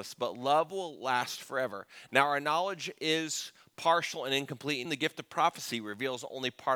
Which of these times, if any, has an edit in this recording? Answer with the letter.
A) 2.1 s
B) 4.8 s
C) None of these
B